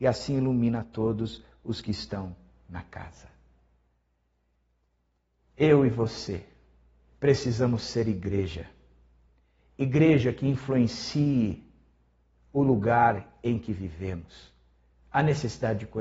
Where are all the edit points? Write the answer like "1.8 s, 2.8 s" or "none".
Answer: 14.9 s